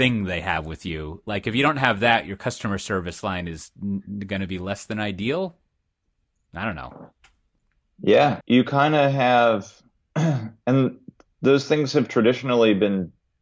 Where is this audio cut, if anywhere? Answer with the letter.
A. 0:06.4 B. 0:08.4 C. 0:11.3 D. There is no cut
B